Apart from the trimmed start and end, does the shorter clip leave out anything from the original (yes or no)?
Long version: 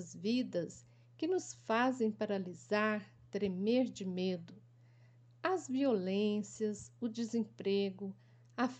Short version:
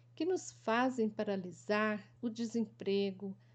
yes